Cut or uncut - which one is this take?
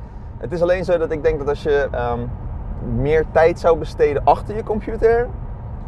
cut